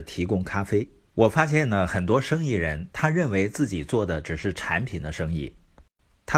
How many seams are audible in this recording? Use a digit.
1